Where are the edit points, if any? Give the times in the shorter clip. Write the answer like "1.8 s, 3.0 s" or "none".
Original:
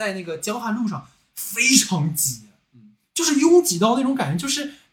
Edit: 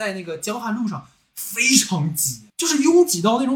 2.5 s